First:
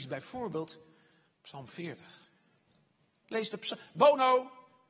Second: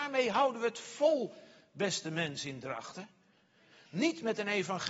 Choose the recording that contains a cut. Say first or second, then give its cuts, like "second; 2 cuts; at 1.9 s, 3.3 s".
first; 1 cut; at 3.2 s